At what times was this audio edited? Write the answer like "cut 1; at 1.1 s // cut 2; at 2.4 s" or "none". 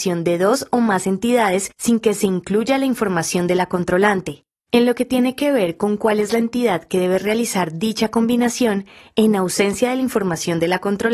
cut 1; at 4.5 s